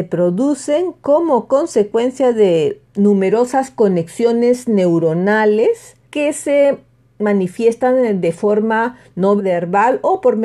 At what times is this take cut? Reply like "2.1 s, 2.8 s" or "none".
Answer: 6.0 s, 9.4 s